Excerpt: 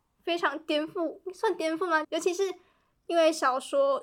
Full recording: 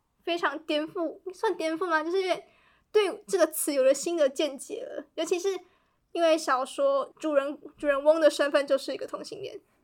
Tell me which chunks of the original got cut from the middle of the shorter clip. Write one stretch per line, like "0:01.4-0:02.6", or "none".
0:02.0-0:05.1